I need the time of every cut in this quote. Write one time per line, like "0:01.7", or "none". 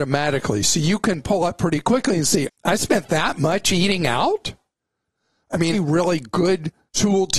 0:02.4
0:05.7